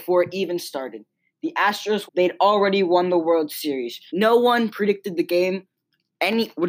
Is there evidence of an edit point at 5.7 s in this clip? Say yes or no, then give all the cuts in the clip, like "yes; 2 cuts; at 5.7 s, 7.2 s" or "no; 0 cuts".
no; 2 cuts; at 2.1 s, 4.1 s